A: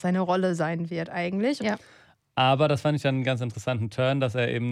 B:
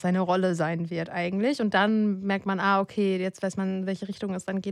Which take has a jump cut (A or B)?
A